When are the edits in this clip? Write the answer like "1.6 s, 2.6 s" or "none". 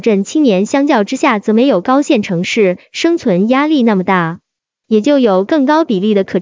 none

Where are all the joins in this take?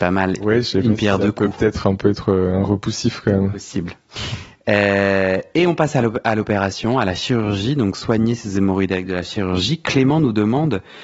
none

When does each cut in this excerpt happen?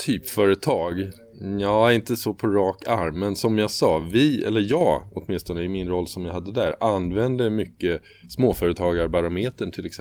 none

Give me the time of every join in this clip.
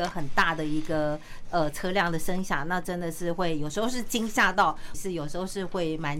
4.9 s

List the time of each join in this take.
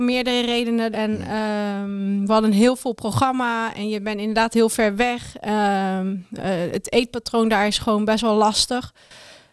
0.9 s

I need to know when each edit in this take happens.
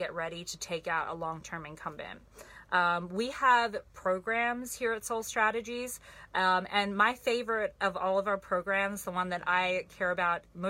none

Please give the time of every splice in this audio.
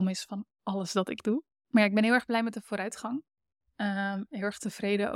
1.5 s

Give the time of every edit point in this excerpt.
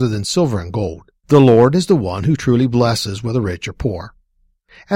1.2 s

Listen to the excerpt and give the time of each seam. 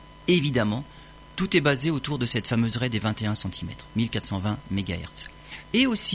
none

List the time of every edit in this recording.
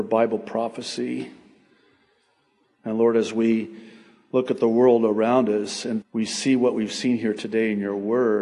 2.6 s, 6.0 s

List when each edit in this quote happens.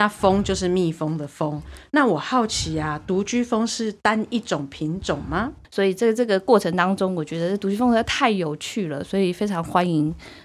5.6 s

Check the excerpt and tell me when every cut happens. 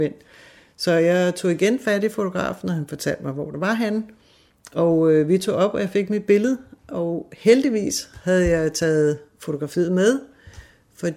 none

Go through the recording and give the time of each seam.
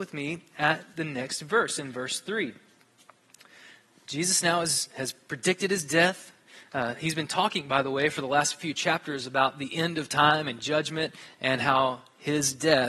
none

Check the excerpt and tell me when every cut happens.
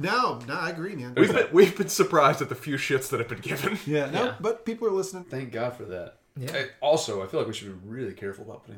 1.1 s, 5.2 s

